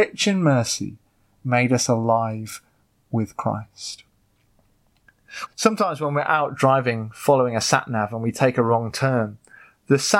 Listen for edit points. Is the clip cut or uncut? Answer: cut